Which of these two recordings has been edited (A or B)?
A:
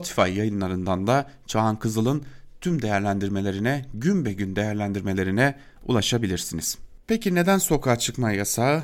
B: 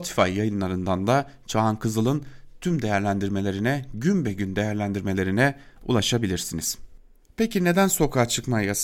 A